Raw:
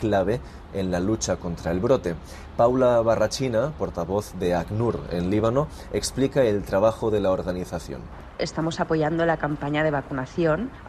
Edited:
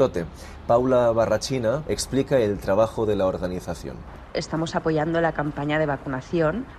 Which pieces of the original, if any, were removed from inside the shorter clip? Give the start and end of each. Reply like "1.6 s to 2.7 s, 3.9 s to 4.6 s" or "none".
3.7 s to 5.9 s